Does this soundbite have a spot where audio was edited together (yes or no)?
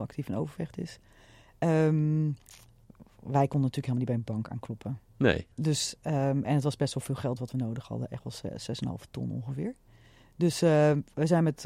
yes